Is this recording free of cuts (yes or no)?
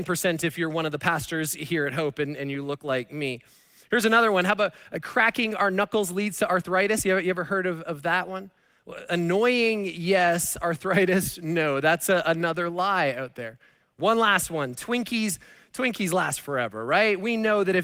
yes